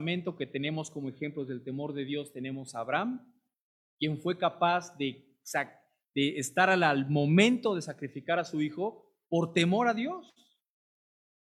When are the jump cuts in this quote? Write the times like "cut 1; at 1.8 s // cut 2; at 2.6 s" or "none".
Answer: none